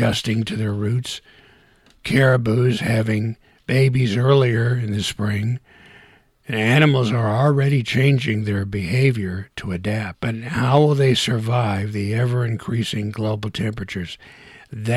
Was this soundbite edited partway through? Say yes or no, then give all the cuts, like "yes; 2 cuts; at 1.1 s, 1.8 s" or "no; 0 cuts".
no; 0 cuts